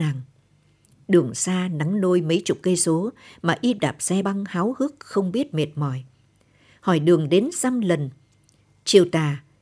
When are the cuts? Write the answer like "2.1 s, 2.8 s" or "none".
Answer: 4.2 s